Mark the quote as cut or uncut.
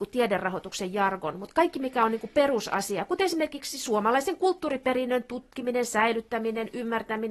uncut